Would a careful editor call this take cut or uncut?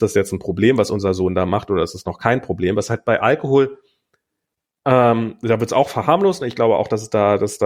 uncut